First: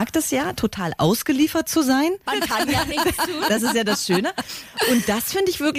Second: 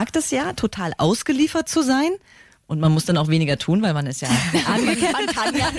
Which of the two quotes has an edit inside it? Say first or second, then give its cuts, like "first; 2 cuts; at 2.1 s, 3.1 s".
first; 1 cut; at 2.3 s